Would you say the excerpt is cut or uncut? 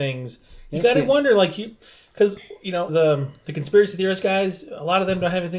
cut